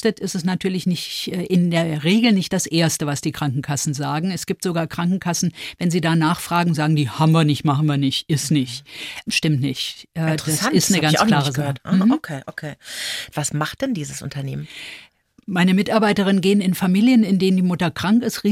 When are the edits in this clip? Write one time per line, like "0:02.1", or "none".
0:13.3